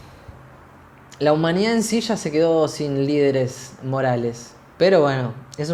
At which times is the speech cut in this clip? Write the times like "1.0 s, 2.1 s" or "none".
4.7 s